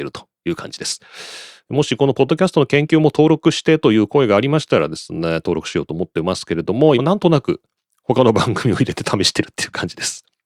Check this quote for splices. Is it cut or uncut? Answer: cut